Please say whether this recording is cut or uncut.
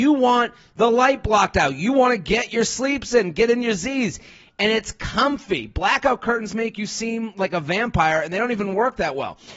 uncut